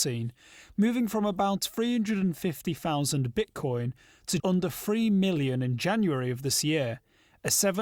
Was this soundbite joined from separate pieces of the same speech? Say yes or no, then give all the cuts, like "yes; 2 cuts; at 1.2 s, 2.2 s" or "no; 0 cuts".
yes; 1 cut; at 4.4 s